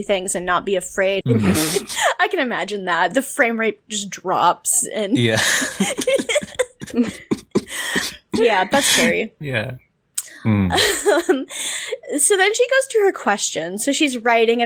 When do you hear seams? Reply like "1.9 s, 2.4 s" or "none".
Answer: 1.2 s

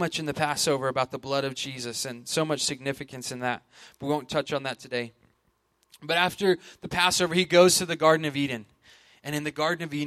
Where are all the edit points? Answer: none

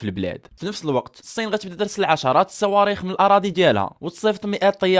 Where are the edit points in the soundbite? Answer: none

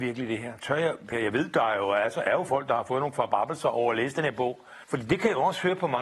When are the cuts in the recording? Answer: 1.1 s, 4.8 s

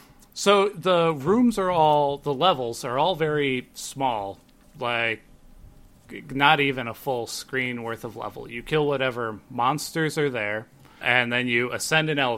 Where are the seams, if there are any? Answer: 11.0 s

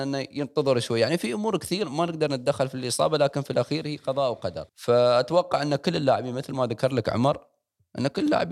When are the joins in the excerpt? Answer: 1.8 s, 4.7 s

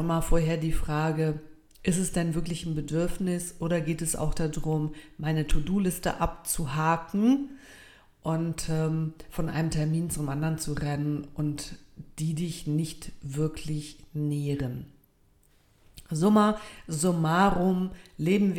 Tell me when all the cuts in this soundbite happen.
none

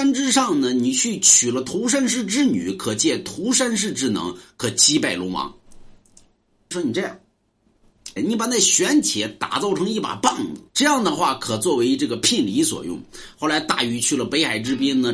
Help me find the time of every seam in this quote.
6.7 s, 8.2 s, 10.7 s

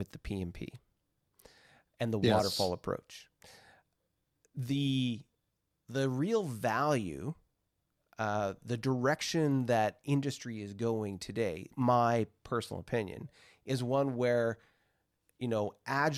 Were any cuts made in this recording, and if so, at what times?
none

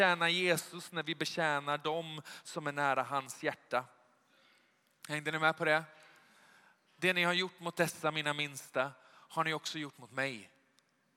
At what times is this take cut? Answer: none

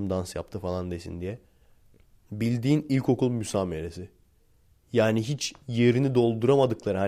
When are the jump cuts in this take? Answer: none

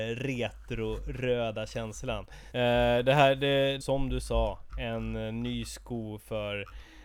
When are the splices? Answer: 2.5 s, 3.8 s

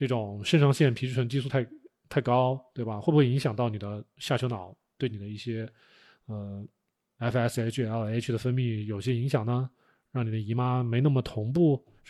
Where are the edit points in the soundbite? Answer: none

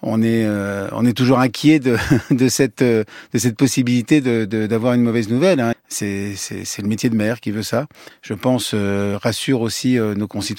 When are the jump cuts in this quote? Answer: 5.7 s, 8.1 s

